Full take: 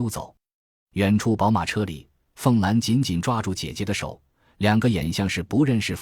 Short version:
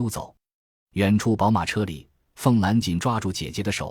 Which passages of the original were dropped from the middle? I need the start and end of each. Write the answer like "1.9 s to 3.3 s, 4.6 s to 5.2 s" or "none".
2.8 s to 3.0 s